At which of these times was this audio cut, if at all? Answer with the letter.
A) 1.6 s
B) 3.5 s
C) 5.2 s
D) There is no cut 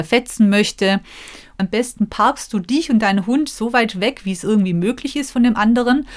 A